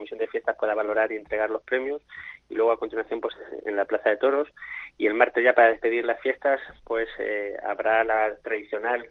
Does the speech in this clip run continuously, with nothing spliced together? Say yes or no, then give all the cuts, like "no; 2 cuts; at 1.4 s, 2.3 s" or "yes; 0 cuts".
no; 1 cut; at 3.6 s